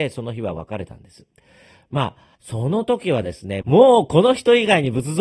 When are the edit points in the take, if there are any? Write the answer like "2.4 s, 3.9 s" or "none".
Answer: 2.4 s, 3.6 s